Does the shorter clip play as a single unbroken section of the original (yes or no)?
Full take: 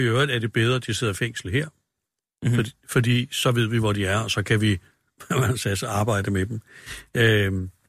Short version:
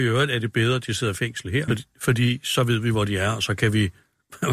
no